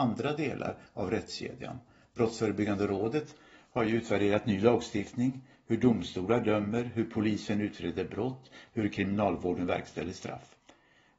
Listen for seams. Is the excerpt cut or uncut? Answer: uncut